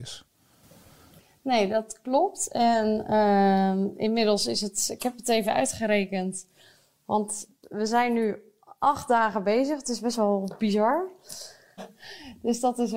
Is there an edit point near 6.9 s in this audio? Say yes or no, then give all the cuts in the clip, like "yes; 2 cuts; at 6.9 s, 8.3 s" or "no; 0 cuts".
no; 1 cut; at 11.8 s